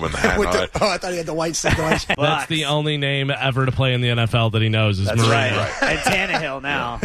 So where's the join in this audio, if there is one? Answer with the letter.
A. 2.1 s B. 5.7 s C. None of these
A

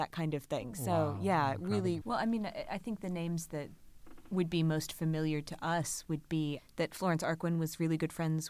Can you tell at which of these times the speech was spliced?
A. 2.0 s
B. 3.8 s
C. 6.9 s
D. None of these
A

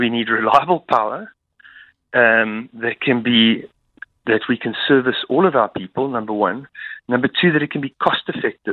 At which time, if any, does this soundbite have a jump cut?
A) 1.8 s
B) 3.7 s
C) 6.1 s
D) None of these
D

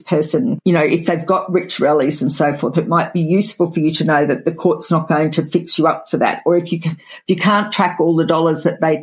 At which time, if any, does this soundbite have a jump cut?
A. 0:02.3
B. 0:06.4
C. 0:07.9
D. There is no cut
D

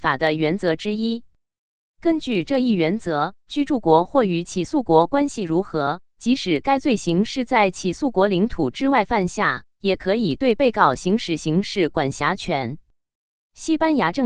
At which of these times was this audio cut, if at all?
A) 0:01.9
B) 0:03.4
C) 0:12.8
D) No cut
B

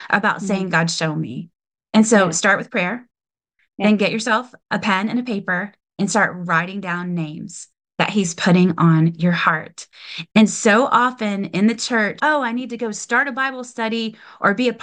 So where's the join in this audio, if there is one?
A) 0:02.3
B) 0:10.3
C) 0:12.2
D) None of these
C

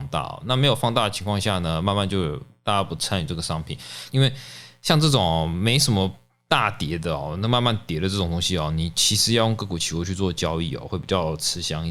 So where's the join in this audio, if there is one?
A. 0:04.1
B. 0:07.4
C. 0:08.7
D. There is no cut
A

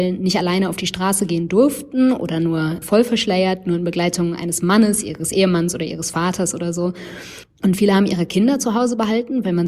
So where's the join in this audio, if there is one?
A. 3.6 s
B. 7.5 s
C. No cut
B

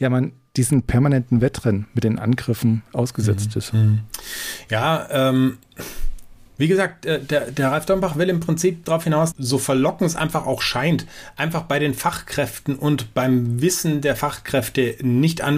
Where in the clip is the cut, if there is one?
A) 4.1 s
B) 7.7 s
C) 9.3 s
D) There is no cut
C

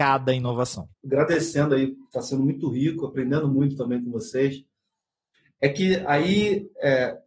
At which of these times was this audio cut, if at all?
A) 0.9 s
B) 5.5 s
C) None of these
A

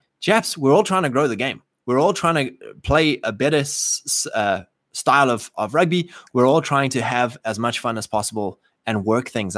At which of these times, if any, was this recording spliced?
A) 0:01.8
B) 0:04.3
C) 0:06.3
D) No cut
C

